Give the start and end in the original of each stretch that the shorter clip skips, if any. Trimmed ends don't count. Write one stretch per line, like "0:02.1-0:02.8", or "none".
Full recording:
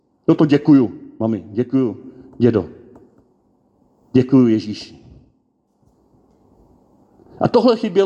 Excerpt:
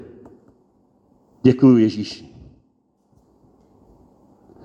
none

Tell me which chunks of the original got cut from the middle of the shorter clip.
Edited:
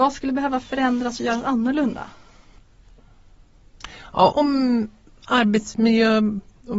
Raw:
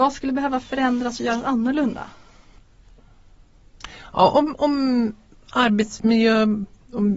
0:04.3-0:04.6

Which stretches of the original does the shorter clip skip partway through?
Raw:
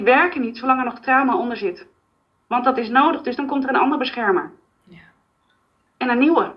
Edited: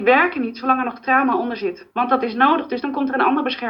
0:01.9-0:02.4

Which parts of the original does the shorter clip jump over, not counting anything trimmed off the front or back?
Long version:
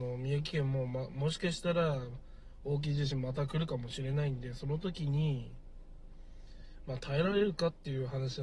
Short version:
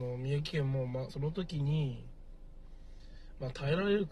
0:01.1-0:04.6

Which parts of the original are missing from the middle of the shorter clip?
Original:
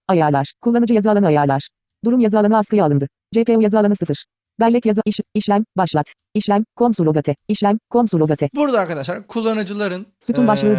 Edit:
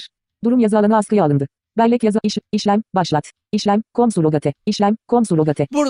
0:03.2-0:04.4

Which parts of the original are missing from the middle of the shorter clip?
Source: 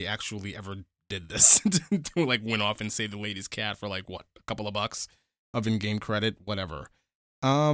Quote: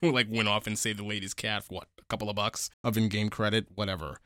0:03.8-0:04.1
0:05.1-0:05.4

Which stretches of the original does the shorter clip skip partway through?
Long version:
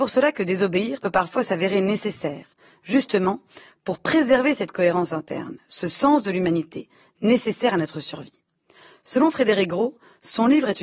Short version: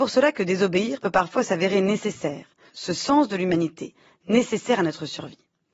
0:02.7-0:05.6

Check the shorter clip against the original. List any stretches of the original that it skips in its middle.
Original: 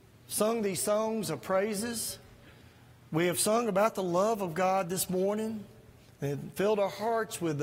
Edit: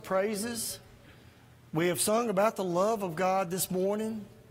none

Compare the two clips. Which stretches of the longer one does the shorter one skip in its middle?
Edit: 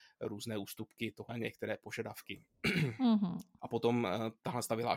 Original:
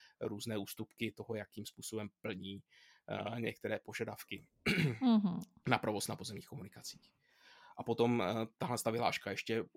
0:01.3-0:03.3
0:05.6-0:07.7

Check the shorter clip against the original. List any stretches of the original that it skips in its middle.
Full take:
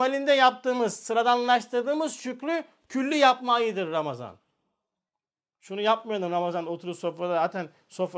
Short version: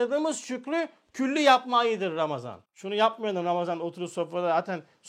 0:04.4-0:05.5

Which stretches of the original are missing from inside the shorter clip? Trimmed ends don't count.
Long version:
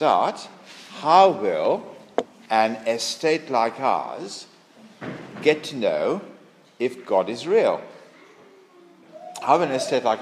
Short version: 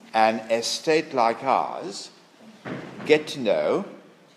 none

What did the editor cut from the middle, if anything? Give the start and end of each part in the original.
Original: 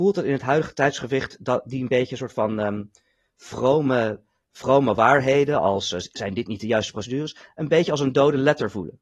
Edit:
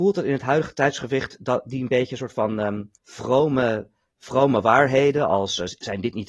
0:03.0-0:03.3

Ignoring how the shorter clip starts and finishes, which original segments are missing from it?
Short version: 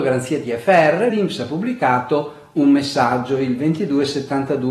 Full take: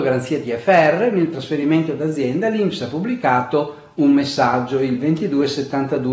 0:01.1-0:02.5

